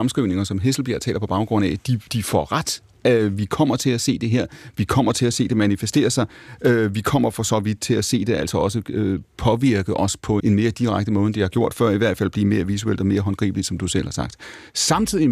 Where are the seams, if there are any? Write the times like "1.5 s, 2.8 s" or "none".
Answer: 2.1 s, 10.4 s